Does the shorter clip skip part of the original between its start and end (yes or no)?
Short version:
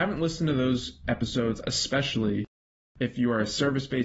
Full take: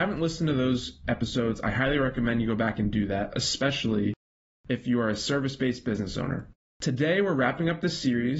yes